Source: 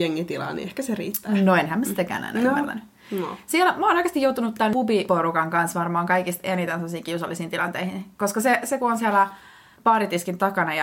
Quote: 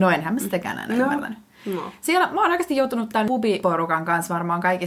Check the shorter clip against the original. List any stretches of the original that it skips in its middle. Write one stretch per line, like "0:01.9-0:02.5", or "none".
none